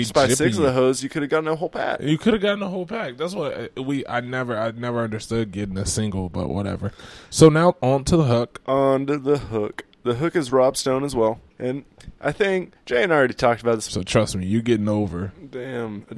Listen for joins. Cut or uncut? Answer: cut